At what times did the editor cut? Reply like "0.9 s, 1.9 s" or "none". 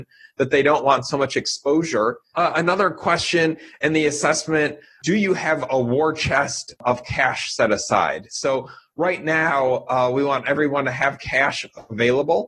2.3 s